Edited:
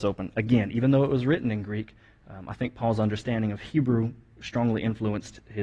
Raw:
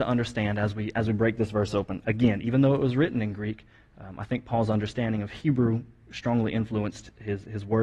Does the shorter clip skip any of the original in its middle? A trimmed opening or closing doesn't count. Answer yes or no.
no